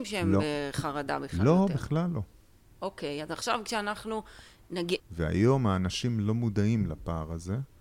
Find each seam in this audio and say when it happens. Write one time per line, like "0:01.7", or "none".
0:05.0